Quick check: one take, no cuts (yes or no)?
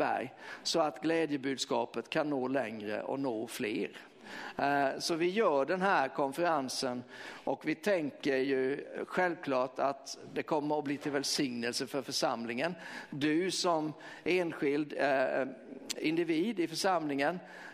yes